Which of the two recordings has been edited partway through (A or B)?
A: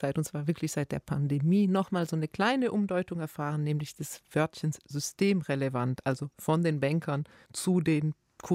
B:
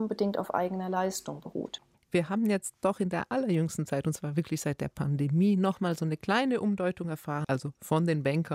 B